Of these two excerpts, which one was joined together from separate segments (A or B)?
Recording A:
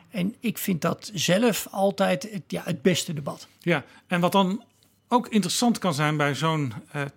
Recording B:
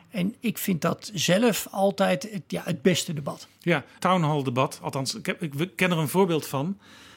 B